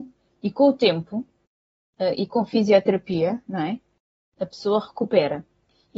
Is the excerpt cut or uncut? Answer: uncut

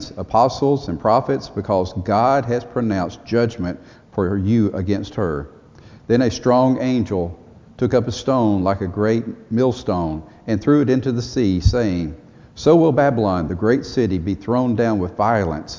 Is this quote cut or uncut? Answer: uncut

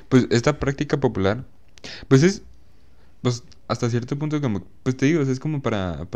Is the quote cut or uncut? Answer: uncut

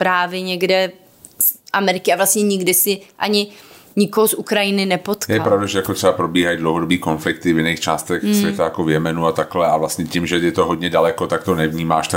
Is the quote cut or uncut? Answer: uncut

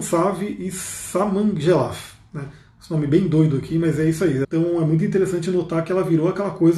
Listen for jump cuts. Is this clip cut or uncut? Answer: cut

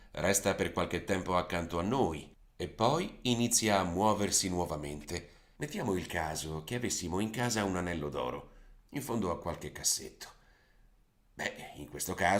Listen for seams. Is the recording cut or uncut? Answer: cut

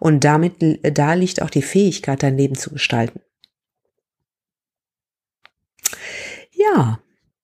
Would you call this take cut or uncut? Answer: uncut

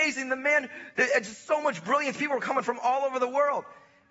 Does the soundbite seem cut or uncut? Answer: uncut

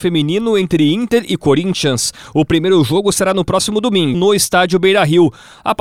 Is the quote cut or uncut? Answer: cut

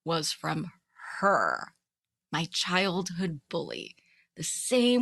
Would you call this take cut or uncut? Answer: cut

